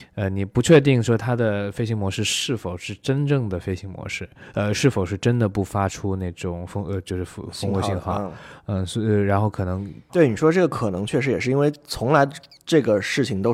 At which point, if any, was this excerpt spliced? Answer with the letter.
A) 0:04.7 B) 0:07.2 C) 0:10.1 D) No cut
C